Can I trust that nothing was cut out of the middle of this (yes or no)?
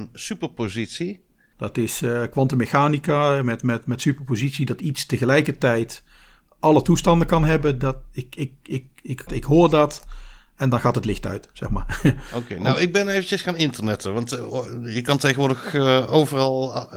no